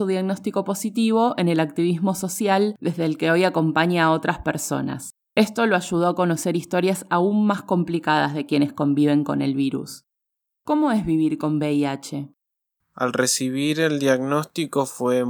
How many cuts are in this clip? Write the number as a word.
zero